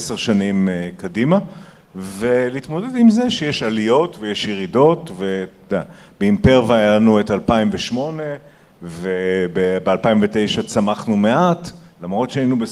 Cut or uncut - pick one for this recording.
uncut